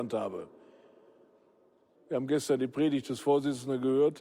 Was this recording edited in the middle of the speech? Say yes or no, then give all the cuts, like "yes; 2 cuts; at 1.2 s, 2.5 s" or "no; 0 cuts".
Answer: yes; 1 cut; at 2.0 s